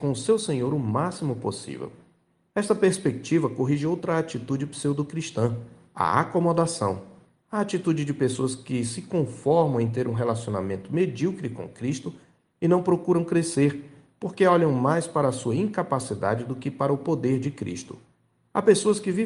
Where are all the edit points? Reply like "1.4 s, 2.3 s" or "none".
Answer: none